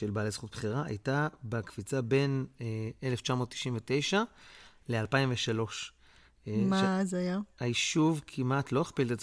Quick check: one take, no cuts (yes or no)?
yes